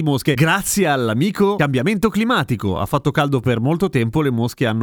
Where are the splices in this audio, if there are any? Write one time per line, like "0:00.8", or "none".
none